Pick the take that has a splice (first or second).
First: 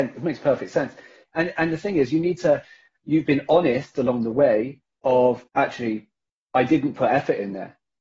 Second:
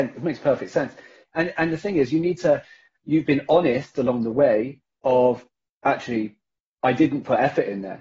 first